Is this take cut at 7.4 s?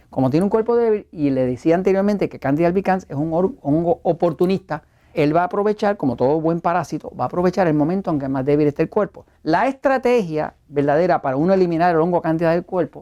no; 2 cuts; at 5.1 s, 9.3 s

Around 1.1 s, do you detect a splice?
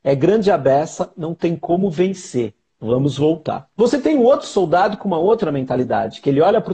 no; 1 cut; at 3.7 s

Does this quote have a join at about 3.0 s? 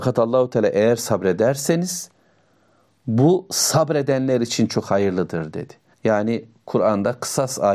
no; 1 cut; at 5.9 s

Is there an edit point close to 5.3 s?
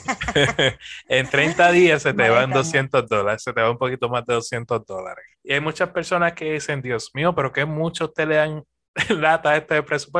yes; 1 cut; at 5.3 s

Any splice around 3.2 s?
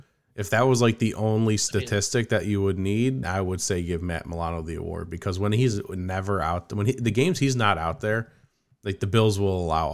yes; 1 cut; at 3.2 s

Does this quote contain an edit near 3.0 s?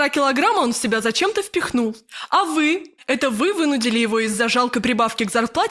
yes; 1 cut; at 3.0 s

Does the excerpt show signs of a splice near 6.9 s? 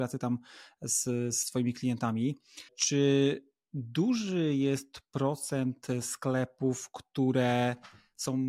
no; 1 cut; at 2.7 s

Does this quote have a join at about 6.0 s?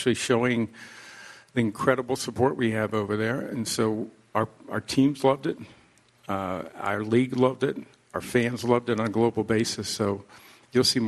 no; 0 cuts

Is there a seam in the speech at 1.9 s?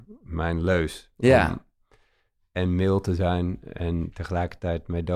no; 0 cuts

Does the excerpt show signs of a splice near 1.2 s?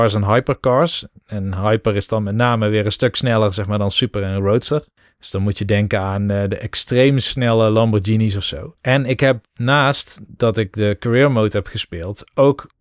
no; 1 cut; at 8.8 s

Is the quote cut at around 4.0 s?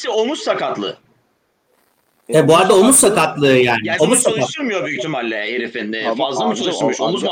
yes; 1 cut; at 4.0 s

